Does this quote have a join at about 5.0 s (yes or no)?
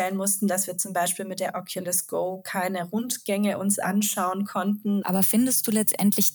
yes